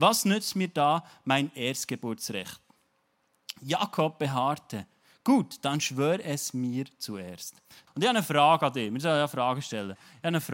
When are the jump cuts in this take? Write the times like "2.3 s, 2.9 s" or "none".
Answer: 7.9 s